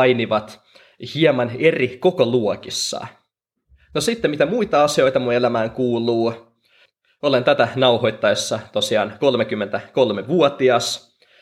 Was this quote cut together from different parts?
no; 0 cuts

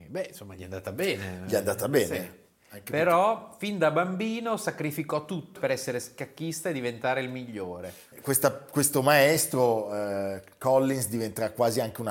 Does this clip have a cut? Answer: yes; 2 cuts; at 5.6 s, 8.1 s

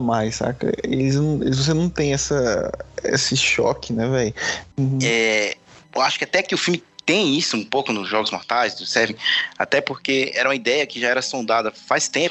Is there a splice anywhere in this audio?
yes; 1 cut; at 4.7 s

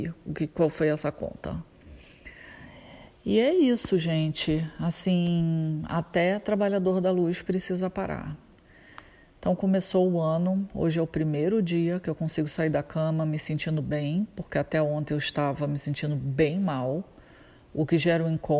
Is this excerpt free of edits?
yes; 0 cuts

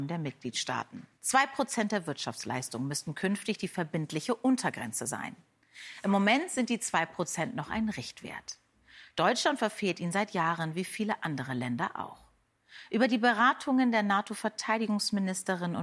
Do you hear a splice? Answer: yes; 1 cut; at 1.1 s

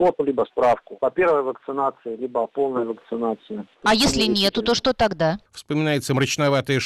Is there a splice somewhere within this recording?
yes; 1 cut; at 5.4 s

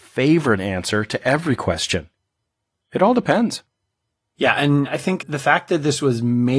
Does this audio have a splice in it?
no; 0 cuts

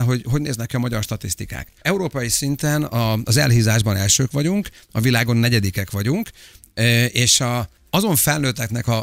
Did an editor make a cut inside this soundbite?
no; 0 cuts

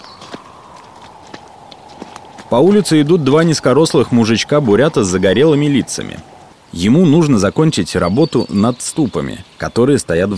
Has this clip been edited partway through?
yes; 1 cut; at 6.5 s

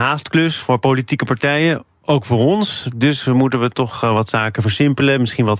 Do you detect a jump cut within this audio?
no; 0 cuts

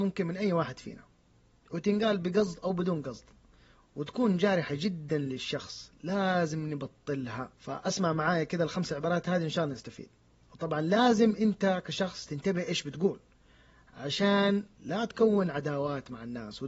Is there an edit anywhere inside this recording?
yes; 1 cut; at 7.5 s

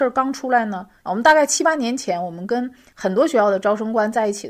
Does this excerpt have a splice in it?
yes; 1 cut; at 1.0 s

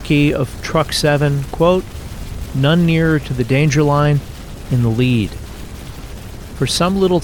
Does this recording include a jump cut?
yes; 2 cuts; at 2.5 s, 4.7 s

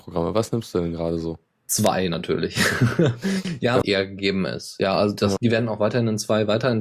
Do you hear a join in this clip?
yes; 2 cuts; at 3.8 s, 5.4 s

